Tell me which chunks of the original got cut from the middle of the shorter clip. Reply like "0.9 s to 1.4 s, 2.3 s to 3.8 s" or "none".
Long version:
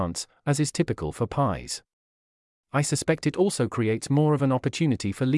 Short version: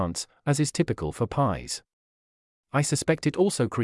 none